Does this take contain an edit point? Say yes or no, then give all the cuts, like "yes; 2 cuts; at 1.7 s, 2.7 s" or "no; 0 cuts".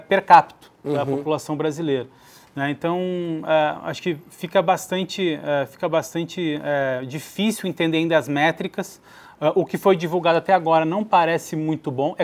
no; 0 cuts